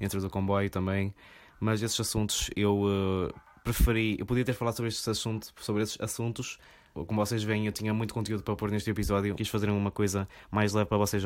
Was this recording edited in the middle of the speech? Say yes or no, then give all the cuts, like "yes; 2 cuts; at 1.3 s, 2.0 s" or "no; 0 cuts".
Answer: yes; 2 cuts; at 6.9 s, 9.4 s